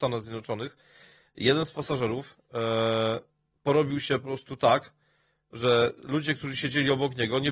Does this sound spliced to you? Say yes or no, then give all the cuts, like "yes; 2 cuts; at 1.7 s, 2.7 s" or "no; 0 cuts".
no; 0 cuts